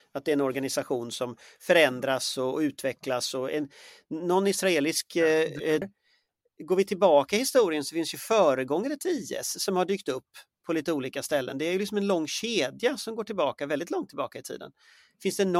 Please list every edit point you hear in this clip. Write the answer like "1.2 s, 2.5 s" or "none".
5.8 s